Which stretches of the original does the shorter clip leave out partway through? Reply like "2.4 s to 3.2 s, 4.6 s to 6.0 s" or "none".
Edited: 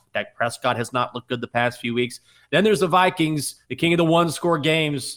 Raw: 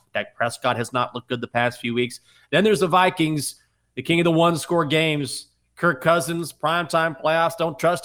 3.6 s to 3.9 s